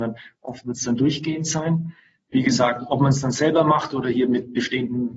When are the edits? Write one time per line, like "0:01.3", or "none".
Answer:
0:02.2